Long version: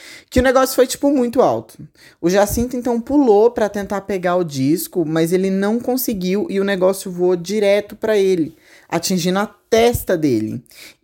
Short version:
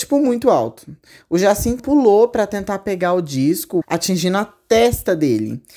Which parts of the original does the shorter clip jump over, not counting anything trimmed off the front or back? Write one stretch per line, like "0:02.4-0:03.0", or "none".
0:02.7-0:03.0
0:05.0-0:08.8